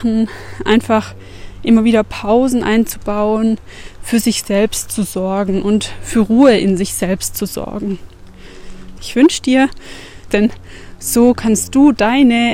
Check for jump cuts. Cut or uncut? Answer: cut